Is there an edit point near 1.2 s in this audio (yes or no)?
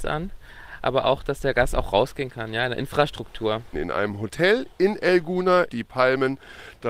no